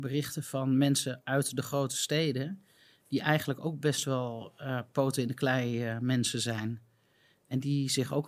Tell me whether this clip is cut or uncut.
uncut